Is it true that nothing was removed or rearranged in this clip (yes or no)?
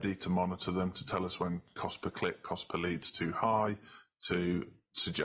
yes